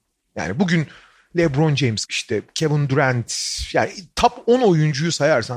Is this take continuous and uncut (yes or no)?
no